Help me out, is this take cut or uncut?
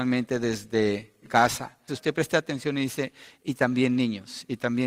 cut